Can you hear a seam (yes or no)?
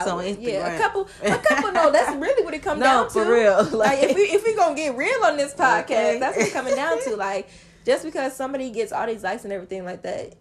no